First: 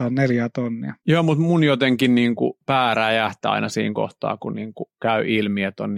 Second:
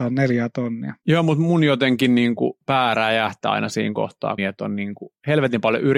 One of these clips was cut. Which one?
second; 1 cut; at 4.4 s

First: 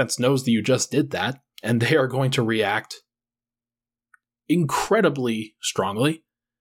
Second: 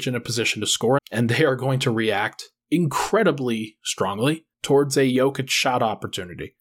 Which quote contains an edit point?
second; 3 cuts; at 1.0 s, 2.6 s, 4.5 s

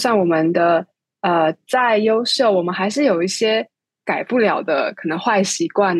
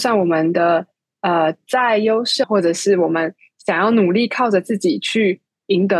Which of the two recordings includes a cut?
second; 1 cut; at 2.4 s

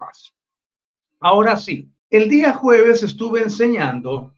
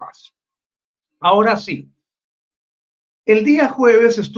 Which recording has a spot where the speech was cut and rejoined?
first; 1 cut; at 2.0 s

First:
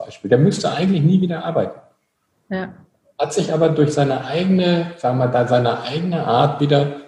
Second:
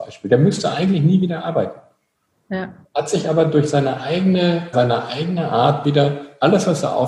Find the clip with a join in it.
second; 2 cuts; at 2.8 s, 4.7 s

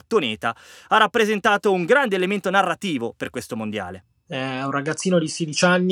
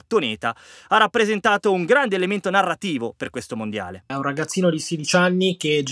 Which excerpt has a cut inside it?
second; 1 cut; at 4.1 s

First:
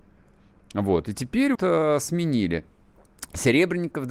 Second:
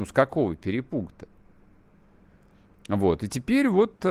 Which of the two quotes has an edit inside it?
first; 1 cut; at 1.5 s

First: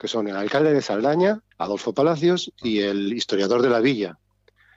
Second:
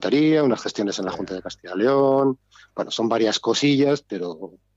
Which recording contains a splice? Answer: first; 1 cut; at 1.5 s

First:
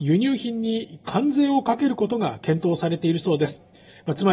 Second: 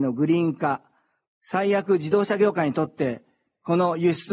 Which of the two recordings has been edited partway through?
second; 1 cut; at 1.2 s

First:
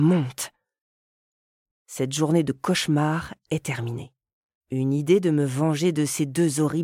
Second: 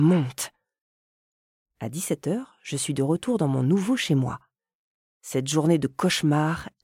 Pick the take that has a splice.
first; 2 cuts; at 1.7 s, 4.6 s

